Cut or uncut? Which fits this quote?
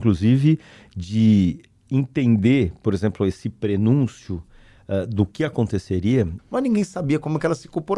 cut